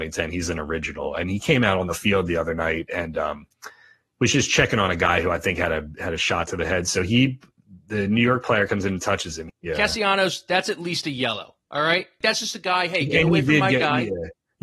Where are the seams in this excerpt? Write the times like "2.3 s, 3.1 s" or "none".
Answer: 9.5 s, 12.2 s